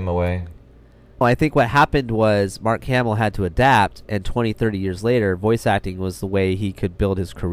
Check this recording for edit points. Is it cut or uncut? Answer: cut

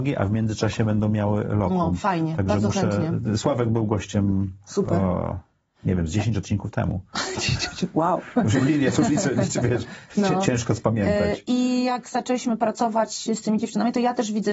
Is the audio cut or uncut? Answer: uncut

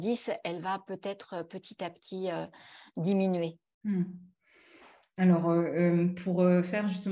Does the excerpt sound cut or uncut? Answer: uncut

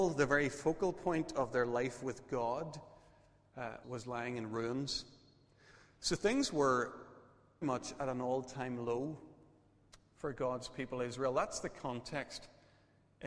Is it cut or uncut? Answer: cut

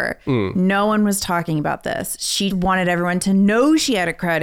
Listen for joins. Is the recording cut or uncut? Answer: cut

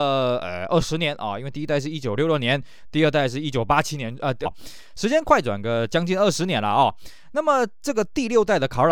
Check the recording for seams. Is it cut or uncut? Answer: cut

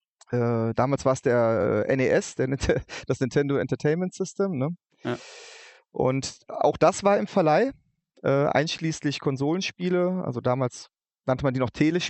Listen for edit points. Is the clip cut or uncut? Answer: uncut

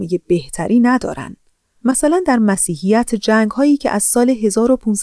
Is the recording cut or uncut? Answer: uncut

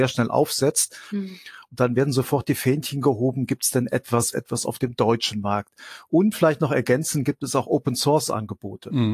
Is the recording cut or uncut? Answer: cut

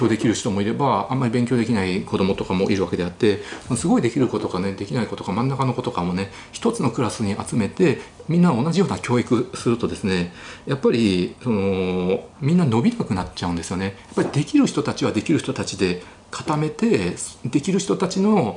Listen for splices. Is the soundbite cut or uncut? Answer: cut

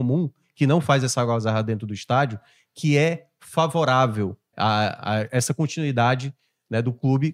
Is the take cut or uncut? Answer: cut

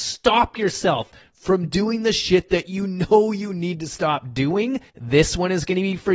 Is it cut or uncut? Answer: cut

